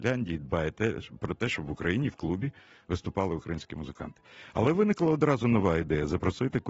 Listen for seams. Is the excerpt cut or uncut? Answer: uncut